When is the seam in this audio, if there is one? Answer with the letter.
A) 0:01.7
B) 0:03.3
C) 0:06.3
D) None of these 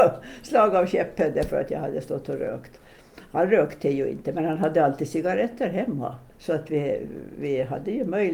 C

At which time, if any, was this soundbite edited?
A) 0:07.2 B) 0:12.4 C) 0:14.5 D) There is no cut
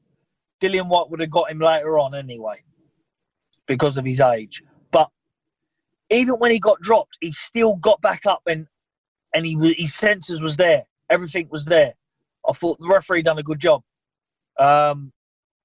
D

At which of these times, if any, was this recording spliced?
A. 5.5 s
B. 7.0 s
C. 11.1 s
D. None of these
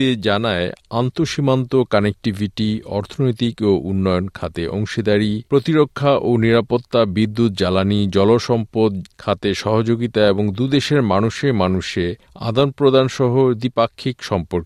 A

